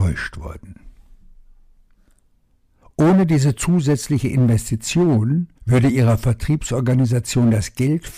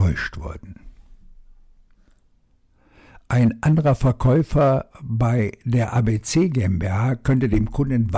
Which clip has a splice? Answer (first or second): first